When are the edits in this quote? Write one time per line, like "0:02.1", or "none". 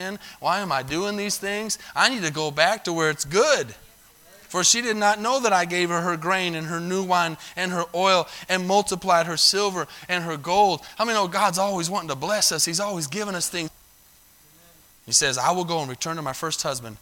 0:13.7
0:14.9